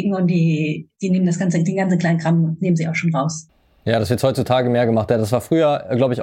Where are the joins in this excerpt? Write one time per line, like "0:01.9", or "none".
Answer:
0:00.9